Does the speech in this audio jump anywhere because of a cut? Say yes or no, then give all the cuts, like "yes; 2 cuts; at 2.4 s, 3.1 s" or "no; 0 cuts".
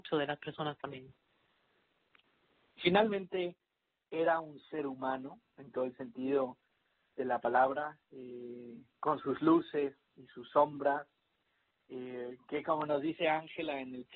no; 0 cuts